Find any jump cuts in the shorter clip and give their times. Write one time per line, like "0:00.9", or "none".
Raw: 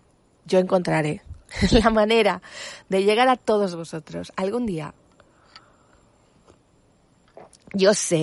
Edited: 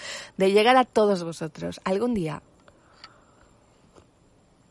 none

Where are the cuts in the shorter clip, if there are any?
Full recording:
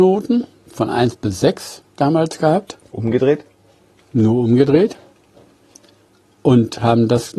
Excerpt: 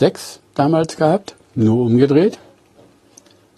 0:01.4

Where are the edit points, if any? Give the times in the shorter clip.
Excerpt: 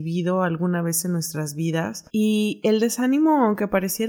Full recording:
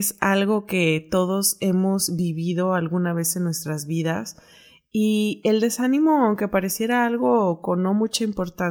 0:02.1

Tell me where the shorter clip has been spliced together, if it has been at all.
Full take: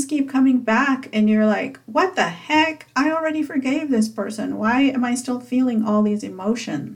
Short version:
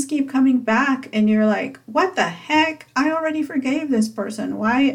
none

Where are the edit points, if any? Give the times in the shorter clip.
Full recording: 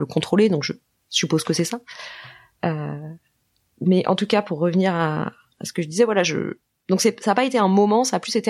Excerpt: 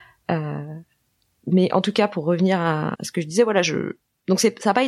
0:02.9

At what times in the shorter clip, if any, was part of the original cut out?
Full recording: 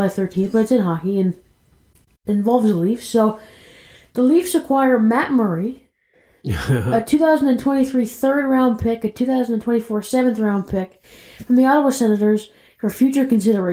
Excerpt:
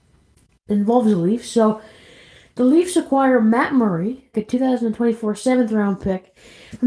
0:04.3

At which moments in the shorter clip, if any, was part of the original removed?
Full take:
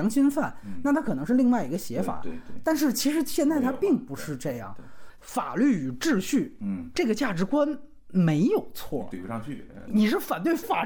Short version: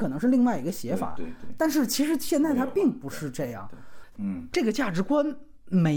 0:04.2

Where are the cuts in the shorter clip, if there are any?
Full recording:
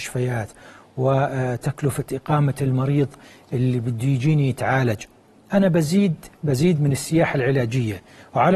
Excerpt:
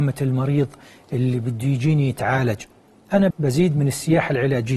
0:03.3

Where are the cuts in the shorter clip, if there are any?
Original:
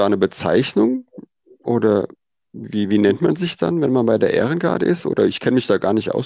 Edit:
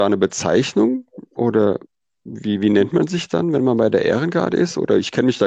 0:01.3

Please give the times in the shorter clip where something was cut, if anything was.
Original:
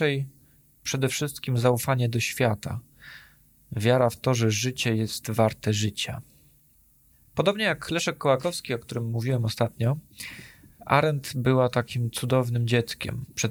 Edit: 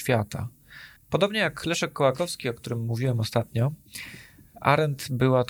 0:01.0

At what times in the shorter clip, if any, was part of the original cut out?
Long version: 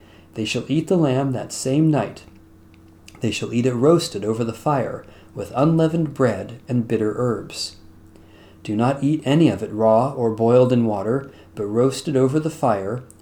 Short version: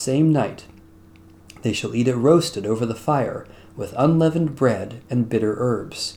none

